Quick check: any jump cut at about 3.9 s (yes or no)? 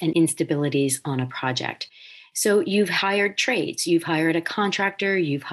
no